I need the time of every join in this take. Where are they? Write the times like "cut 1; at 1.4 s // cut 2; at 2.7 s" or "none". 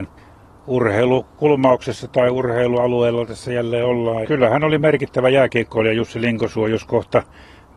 cut 1; at 4.2 s